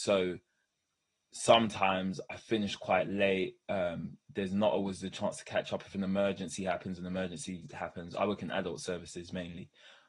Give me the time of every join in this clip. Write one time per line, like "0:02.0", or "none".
none